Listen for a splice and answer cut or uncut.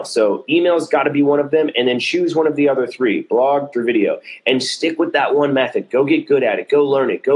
cut